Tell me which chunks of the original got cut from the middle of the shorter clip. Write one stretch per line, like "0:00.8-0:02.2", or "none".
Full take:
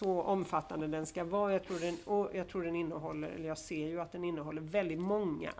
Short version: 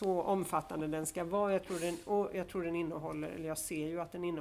none